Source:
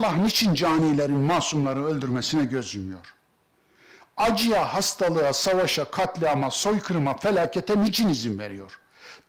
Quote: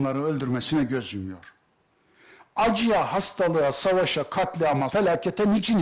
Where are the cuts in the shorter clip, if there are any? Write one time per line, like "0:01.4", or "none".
0:04.9

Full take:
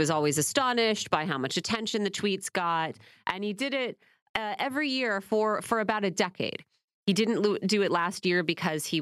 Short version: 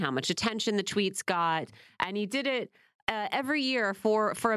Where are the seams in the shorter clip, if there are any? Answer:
none

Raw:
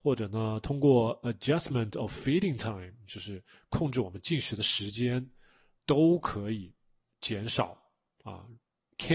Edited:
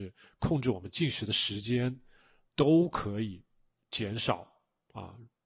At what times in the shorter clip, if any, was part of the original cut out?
none

